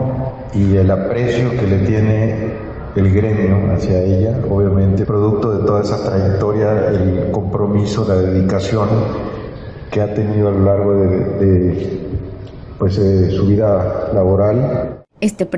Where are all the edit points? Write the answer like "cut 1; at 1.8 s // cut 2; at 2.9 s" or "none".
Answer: cut 1; at 5.0 s